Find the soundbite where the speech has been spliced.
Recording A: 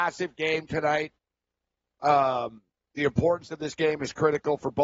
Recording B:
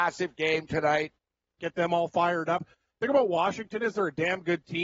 B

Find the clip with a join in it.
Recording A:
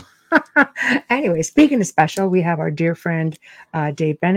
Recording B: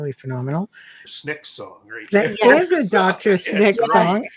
B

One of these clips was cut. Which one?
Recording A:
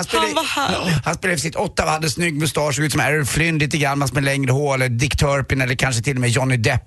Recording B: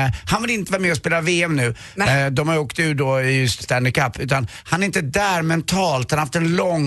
B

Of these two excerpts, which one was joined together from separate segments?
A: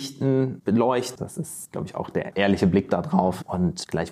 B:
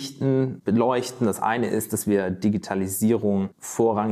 A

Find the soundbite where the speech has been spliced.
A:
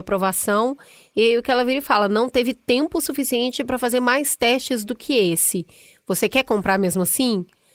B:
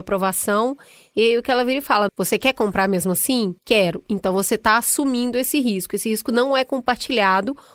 B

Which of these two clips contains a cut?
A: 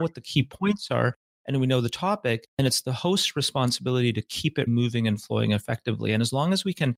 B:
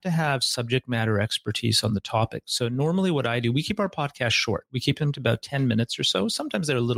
A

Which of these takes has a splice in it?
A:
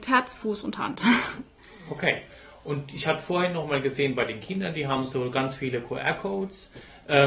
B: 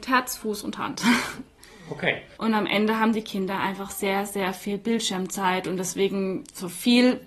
B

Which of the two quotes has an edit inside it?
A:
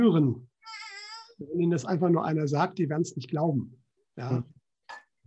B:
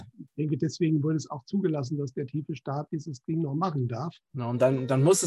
B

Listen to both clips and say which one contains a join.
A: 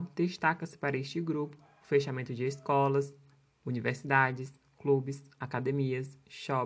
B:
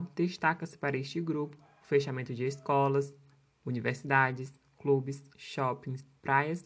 B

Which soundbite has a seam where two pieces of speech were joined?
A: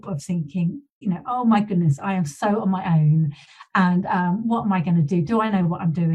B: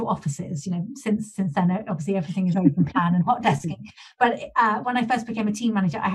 A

